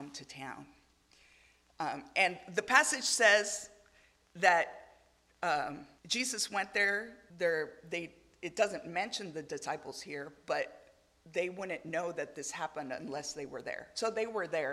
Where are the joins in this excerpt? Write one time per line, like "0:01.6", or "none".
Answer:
0:06.0
0:07.3